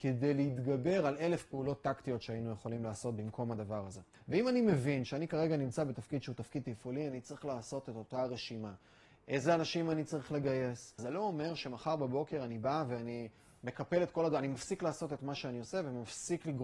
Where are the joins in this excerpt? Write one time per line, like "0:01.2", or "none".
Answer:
0:04.1
0:11.0